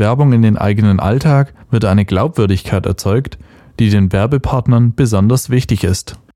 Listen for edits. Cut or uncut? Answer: cut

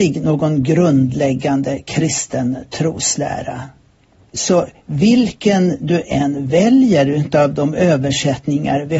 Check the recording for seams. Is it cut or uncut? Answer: cut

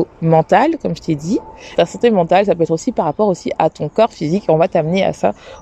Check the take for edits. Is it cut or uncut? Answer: cut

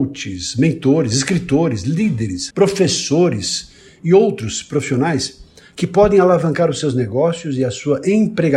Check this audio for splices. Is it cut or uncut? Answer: cut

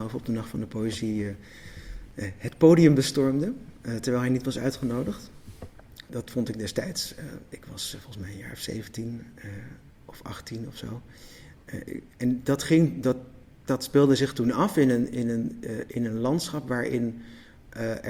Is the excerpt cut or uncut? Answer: cut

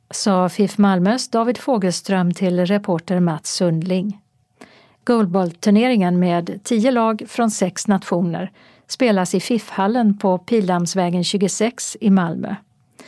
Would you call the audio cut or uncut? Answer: uncut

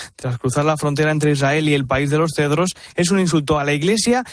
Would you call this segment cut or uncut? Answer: uncut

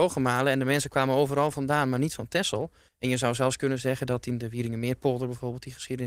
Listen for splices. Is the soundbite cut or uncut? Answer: cut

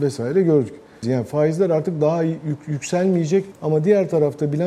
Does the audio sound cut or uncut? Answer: cut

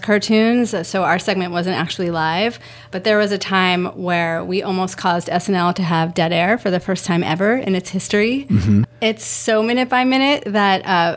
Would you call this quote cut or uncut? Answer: cut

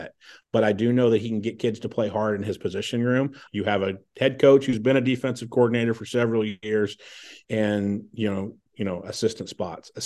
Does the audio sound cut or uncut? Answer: cut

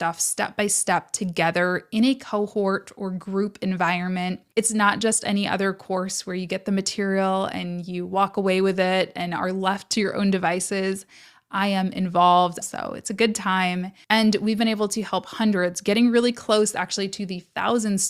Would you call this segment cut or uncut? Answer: cut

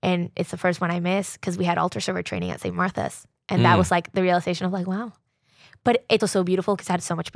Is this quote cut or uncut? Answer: cut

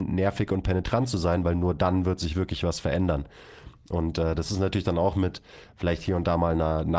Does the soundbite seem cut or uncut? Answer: uncut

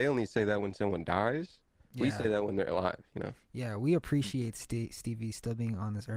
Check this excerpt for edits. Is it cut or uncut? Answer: uncut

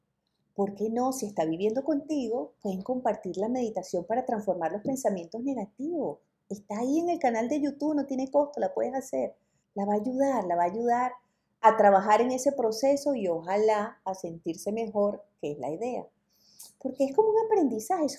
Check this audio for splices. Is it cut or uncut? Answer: cut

